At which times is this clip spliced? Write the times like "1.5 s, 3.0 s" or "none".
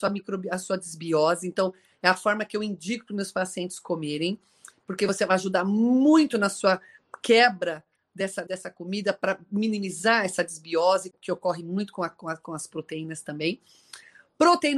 8.5 s, 11.1 s